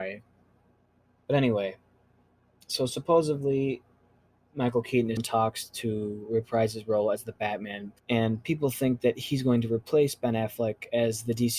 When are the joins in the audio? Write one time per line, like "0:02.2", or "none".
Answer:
0:01.2
0:05.2
0:08.0